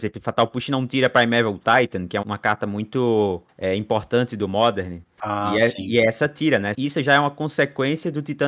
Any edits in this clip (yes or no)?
yes